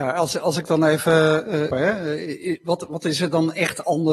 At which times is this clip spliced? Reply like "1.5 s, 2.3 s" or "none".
1.7 s